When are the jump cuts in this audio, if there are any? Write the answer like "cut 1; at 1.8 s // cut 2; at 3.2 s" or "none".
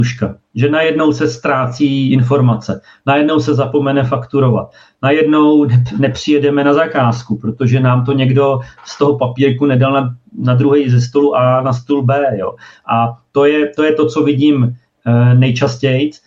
none